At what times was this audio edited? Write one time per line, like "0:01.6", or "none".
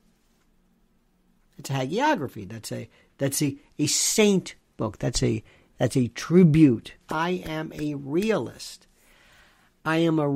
0:07.0